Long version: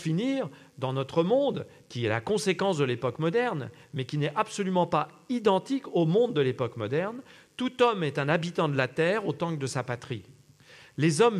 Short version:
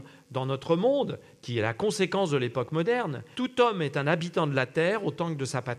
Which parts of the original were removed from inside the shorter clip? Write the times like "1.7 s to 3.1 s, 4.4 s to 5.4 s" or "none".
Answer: 3.8 s to 7.6 s